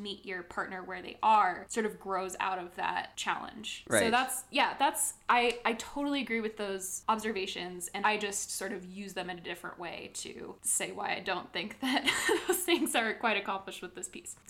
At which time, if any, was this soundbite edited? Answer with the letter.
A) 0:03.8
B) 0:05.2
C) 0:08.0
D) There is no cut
C